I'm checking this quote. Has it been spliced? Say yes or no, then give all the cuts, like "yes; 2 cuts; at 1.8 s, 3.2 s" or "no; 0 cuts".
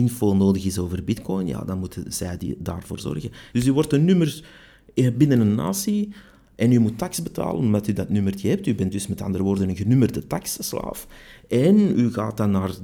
yes; 1 cut; at 3.5 s